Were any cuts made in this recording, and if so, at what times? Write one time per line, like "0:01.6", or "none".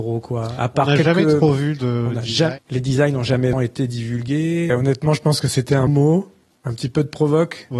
0:03.5
0:04.7
0:05.9